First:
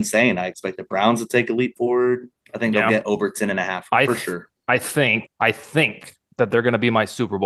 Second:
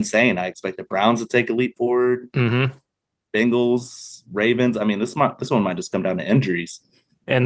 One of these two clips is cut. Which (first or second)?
first